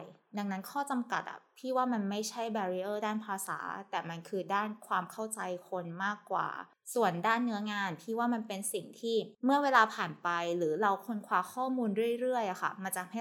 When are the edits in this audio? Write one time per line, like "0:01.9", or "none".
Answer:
none